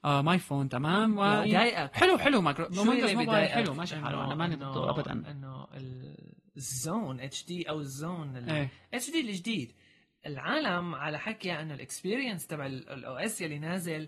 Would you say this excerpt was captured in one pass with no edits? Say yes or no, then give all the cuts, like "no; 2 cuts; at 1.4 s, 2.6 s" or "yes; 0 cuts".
no; 1 cut; at 1.5 s